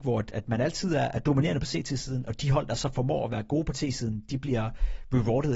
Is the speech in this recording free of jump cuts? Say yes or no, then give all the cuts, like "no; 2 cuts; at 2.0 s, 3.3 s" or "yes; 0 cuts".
yes; 0 cuts